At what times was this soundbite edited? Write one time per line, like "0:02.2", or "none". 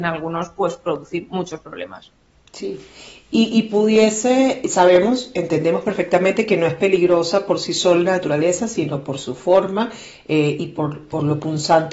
none